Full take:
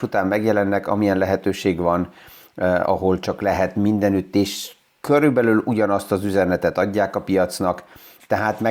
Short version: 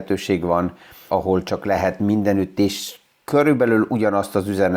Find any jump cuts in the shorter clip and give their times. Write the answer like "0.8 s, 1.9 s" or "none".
1.1 s